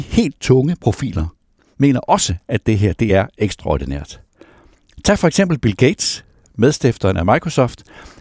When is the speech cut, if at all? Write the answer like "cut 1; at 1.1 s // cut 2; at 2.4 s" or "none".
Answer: none